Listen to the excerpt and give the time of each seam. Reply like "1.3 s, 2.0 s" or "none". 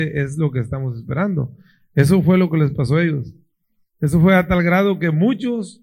none